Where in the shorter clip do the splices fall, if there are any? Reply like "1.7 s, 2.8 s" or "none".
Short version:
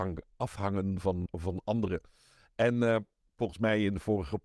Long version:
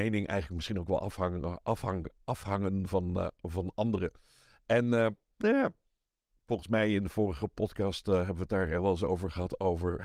1.3 s, 3.2 s